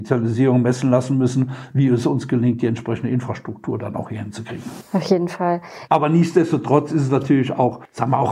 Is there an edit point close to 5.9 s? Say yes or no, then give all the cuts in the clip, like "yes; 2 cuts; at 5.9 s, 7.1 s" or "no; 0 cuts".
yes; 1 cut; at 5.9 s